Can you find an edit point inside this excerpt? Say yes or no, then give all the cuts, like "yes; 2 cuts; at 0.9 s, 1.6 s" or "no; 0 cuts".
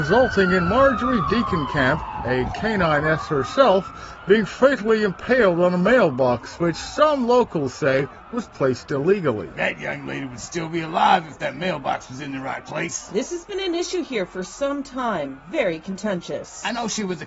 no; 0 cuts